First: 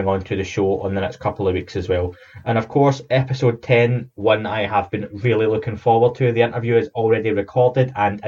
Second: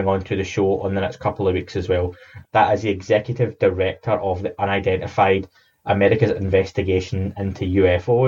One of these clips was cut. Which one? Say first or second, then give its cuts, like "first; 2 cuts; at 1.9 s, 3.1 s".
second; 1 cut; at 2.4 s